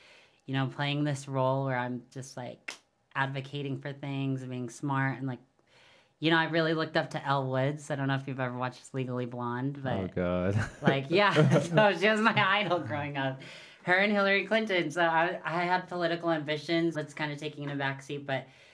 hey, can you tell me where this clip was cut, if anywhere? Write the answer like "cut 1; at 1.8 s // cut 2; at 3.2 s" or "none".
cut 1; at 16.9 s